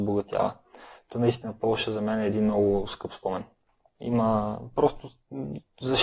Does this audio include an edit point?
yes; 1 cut; at 3.9 s

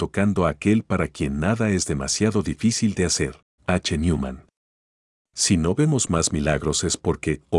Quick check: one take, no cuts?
no; 1 cut; at 3.6 s

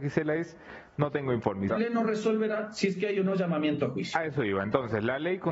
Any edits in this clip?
yes; 1 cut; at 1.7 s

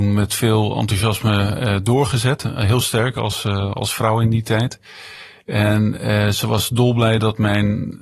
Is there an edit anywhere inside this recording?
no; 0 cuts

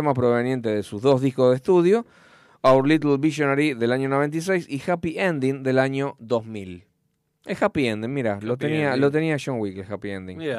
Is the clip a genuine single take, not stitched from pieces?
yes; 0 cuts

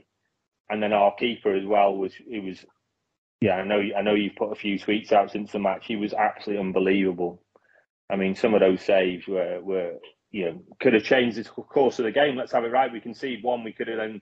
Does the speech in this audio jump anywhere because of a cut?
no; 0 cuts

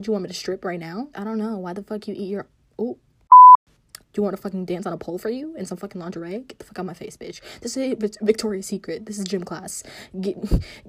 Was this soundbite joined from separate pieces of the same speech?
yes; 2 cuts; at 1.1 s, 4.0 s

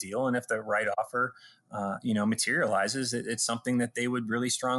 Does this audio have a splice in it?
no; 0 cuts

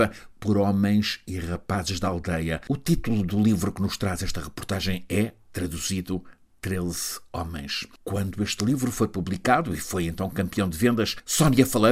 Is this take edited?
no; 0 cuts

